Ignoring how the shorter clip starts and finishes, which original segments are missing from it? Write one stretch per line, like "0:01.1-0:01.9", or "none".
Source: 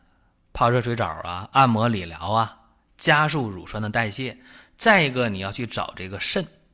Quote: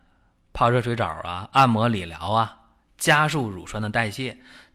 none